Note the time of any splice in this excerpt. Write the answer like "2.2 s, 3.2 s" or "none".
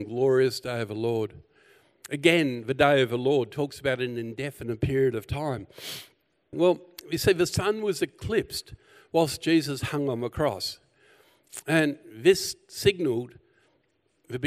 6.5 s